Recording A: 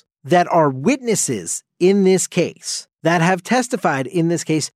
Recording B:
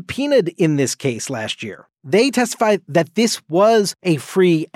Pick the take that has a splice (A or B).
B